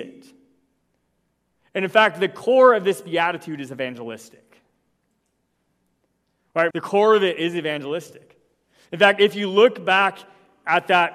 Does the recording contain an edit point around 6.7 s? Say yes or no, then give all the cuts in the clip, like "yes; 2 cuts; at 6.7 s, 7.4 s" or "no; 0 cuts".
yes; 1 cut; at 6.7 s